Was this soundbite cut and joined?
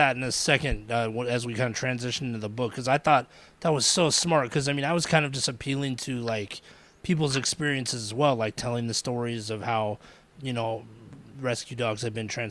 no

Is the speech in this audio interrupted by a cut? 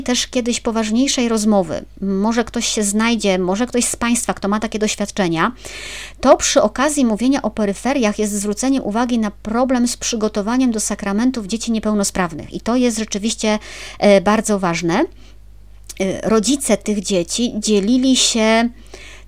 no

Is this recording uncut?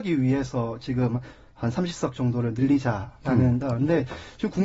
no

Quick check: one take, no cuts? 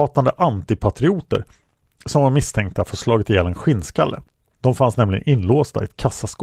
no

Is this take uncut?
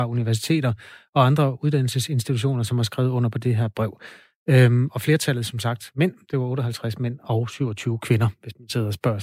yes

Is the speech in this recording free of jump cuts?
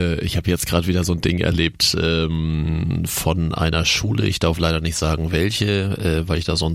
yes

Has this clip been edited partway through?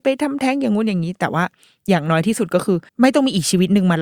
yes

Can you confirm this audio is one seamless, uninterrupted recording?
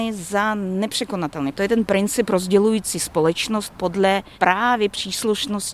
no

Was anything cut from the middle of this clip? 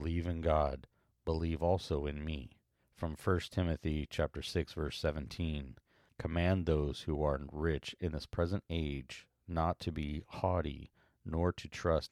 no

